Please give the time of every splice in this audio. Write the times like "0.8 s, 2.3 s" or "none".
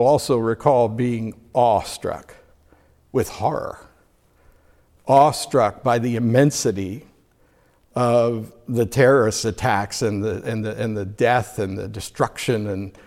none